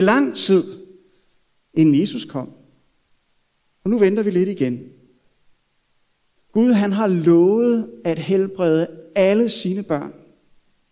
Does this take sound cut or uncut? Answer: cut